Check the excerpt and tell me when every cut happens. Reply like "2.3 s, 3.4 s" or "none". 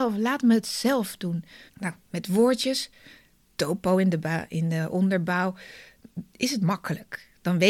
1.7 s

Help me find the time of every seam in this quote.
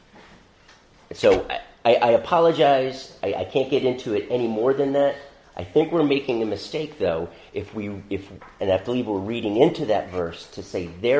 none

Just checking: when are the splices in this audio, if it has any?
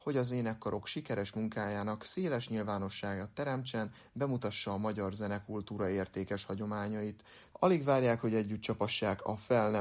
7.5 s

